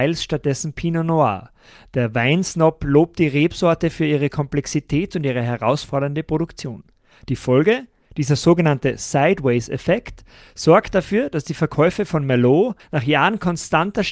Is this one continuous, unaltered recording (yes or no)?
no